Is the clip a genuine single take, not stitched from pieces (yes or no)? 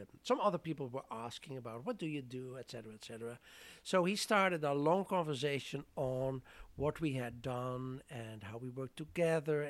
yes